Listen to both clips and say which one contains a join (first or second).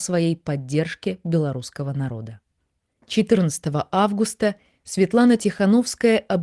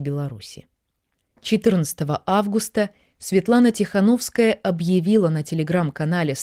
first